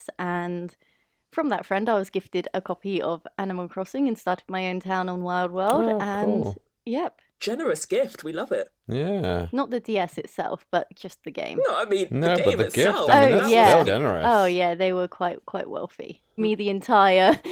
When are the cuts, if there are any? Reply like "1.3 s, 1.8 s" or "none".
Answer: 13.9 s, 16.4 s